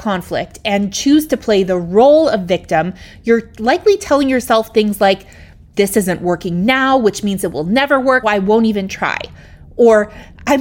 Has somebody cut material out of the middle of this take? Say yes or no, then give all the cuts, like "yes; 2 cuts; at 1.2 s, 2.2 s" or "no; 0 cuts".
yes; 1 cut; at 8.2 s